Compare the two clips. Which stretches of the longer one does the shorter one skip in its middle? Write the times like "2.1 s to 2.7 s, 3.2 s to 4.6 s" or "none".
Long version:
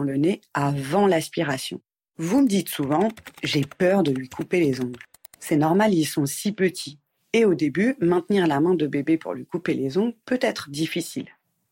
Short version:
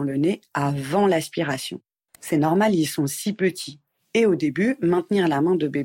2.1 s to 5.3 s